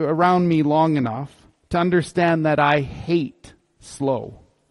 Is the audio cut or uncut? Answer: uncut